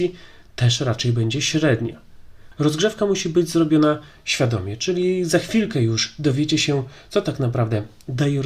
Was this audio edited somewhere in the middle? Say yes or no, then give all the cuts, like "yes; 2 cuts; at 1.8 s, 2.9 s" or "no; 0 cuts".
no; 0 cuts